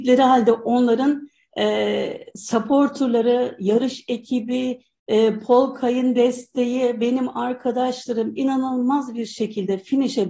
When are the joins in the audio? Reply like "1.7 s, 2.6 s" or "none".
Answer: none